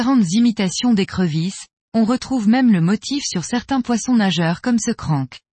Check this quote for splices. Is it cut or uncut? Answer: uncut